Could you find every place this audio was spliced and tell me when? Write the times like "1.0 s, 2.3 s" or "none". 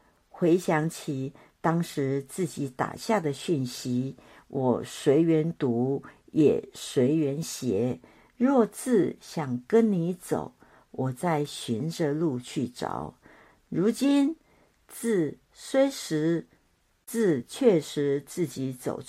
none